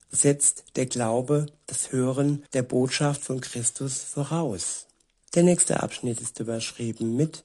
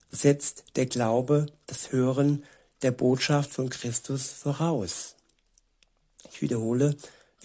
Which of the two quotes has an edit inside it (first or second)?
first